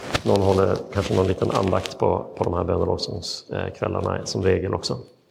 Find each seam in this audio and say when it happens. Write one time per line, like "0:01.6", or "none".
none